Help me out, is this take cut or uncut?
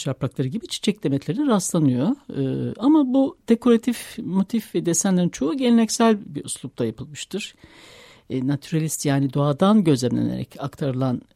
uncut